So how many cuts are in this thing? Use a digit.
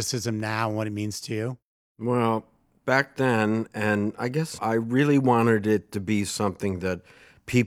1